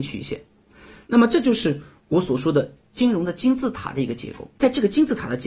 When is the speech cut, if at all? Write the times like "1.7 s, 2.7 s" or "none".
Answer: 4.5 s